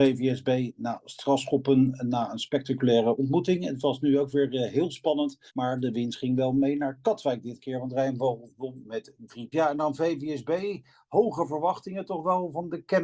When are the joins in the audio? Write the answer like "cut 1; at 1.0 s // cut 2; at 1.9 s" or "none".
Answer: cut 1; at 5.5 s // cut 2; at 9.5 s